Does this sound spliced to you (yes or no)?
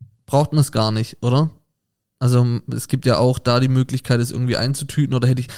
no